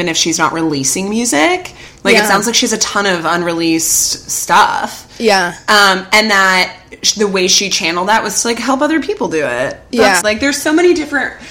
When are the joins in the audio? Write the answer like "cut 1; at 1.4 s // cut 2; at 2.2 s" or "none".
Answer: cut 1; at 10.2 s